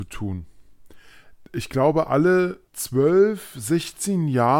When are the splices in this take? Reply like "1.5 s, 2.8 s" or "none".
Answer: 1.4 s, 2.7 s